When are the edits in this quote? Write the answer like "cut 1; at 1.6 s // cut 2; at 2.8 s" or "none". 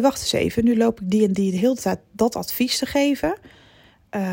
none